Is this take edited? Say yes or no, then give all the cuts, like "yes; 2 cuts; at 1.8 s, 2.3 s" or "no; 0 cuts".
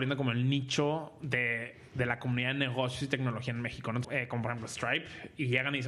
yes; 1 cut; at 4.0 s